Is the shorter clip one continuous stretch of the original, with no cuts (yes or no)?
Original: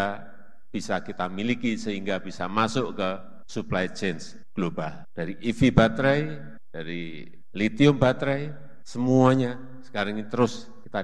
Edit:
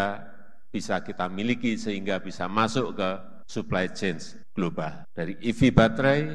yes